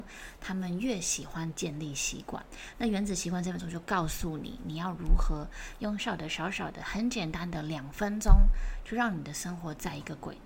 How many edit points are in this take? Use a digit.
2